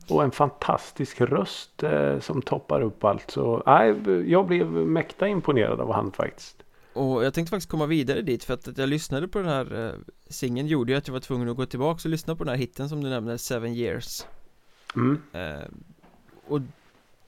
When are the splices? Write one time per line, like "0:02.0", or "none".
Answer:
0:14.9